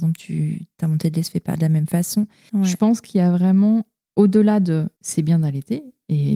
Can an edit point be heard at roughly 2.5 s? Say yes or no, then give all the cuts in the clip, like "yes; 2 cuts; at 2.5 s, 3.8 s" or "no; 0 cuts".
yes; 2 cuts; at 2.5 s, 5.0 s